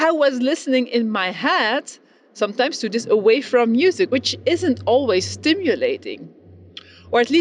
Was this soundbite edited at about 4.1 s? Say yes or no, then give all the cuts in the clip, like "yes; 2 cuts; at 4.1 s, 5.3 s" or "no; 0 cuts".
yes; 1 cut; at 4.1 s